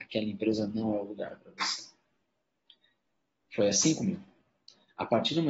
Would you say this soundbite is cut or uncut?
uncut